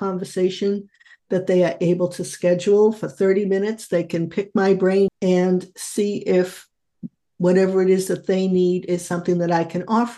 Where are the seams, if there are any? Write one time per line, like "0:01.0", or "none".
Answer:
0:05.1